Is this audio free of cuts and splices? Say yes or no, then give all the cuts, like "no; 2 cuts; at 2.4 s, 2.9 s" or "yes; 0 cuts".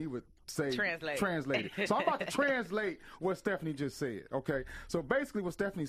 yes; 0 cuts